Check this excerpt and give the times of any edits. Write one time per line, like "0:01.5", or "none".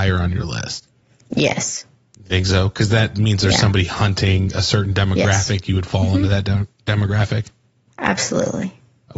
none